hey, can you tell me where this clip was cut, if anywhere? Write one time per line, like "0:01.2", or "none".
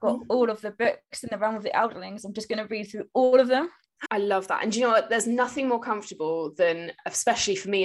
0:04.0